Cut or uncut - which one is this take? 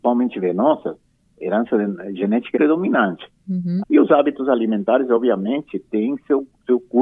cut